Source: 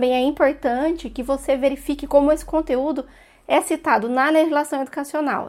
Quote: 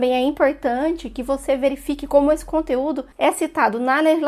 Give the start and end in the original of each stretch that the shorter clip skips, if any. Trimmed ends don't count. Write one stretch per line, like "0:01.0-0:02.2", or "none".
0:03.1-0:03.4